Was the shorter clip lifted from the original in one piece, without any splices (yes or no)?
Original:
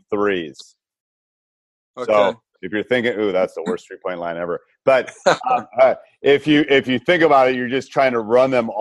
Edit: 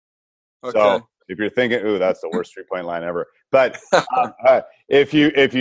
yes